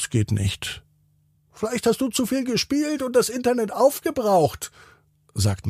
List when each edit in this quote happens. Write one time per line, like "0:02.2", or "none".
0:01.3